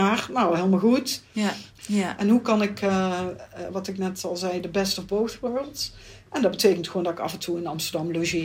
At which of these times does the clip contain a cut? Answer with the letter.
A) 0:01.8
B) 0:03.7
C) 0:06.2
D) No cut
A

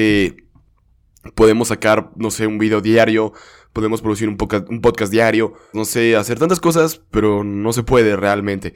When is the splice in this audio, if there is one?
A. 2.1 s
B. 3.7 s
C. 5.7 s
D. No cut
C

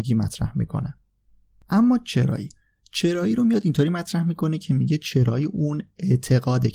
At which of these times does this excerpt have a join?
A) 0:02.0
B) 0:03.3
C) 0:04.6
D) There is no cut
D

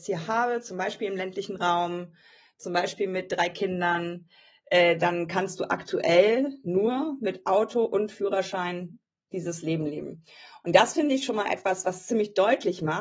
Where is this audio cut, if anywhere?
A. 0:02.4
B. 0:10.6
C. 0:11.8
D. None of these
D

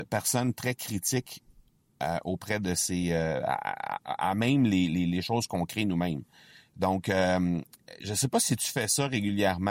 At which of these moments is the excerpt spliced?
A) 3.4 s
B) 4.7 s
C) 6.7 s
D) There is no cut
D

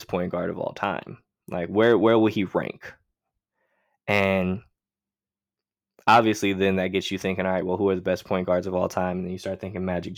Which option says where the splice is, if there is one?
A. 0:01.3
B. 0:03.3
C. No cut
C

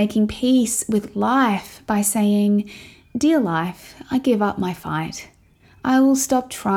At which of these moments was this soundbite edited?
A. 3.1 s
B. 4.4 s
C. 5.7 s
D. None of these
D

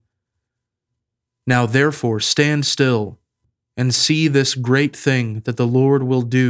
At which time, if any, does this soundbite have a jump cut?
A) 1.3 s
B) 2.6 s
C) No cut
C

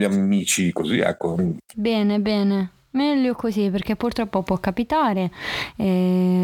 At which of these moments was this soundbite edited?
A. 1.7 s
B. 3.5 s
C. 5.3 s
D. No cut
A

